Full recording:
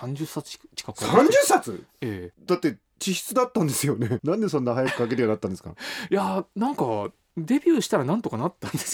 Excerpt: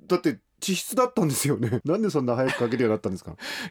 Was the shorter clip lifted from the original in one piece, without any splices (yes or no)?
yes